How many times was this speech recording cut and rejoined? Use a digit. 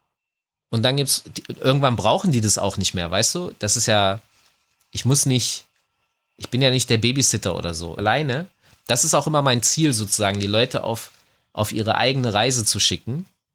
1